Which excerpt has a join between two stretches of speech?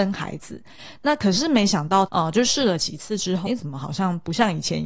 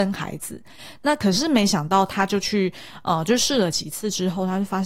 first; 2 cuts; at 2.1 s, 3.5 s

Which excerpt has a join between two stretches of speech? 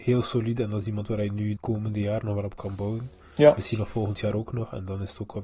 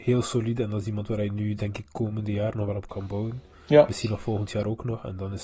first; 1 cut; at 1.6 s

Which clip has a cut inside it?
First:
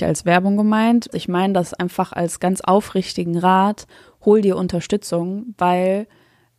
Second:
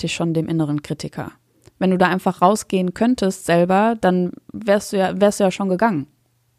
first; 1 cut; at 1.1 s

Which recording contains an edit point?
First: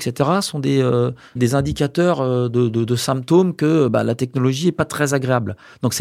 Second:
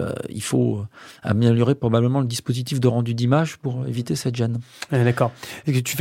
first; 1 cut; at 1.4 s

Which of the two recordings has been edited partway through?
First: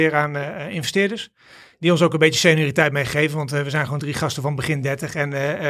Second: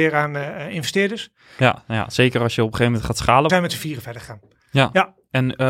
second; 2 cuts; at 1.6 s, 3.5 s

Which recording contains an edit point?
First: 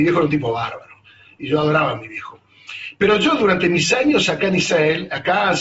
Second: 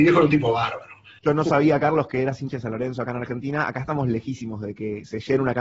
second; 1 cut; at 1.2 s

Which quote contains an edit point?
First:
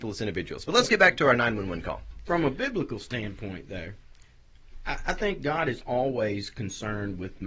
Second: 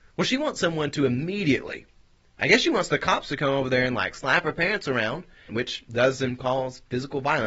second; 1 cut; at 5.5 s

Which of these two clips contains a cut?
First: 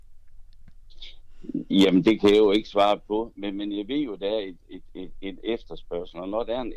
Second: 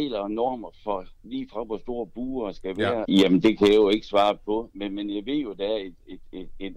second; 1 cut; at 3.0 s

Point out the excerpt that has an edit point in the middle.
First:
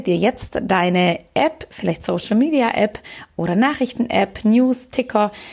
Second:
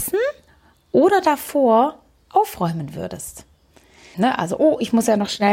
second; 1 cut; at 4.1 s

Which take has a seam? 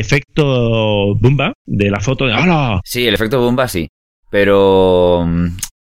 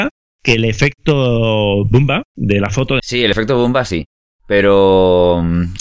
second; 1 cut; at 3.0 s

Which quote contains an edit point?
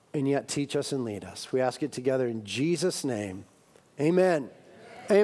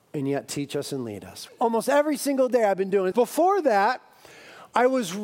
second; 2 cuts; at 1.5 s, 3.1 s

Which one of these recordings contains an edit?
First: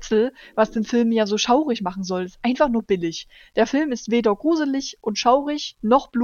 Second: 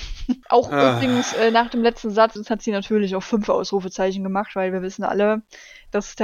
second; 1 cut; at 2.4 s

